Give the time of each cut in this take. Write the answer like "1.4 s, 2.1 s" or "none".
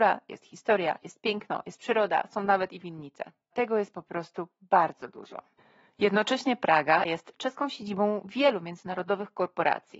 3.5 s, 7.0 s